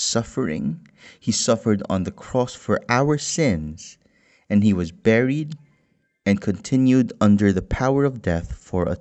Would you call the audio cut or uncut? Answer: uncut